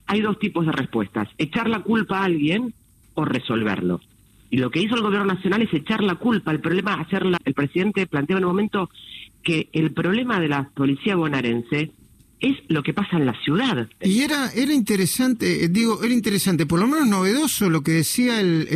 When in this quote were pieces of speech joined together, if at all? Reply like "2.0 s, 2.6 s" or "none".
7.4 s, 14.0 s